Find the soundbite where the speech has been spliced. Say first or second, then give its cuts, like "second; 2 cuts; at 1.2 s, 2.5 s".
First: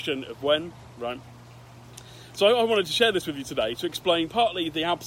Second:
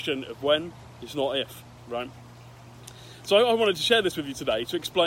first; 1 cut; at 0.9 s